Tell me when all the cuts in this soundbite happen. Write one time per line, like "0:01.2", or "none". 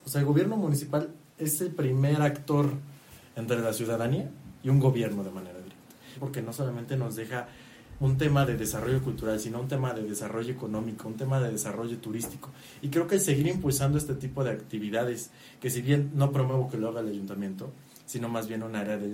0:06.2
0:08.0